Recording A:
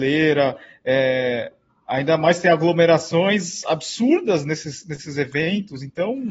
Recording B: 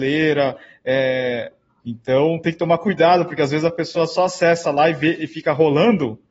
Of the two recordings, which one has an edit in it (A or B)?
B